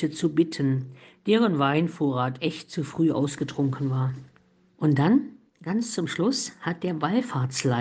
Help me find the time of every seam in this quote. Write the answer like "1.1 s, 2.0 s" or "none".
4.6 s